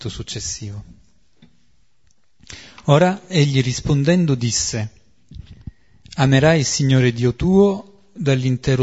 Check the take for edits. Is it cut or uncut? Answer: uncut